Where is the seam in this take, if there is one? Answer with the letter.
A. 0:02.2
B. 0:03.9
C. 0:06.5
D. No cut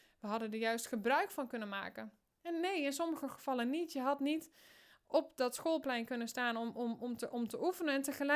D